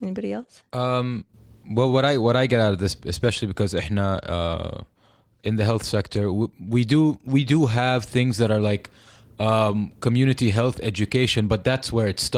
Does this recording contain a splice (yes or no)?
no